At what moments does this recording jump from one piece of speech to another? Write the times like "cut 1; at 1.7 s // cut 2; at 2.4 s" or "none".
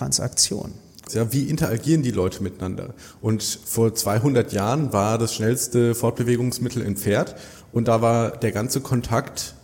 cut 1; at 1.1 s